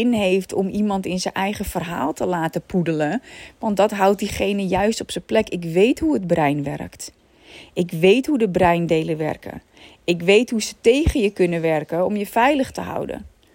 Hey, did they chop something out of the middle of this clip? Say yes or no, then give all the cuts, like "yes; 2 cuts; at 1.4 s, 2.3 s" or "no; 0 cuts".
no; 0 cuts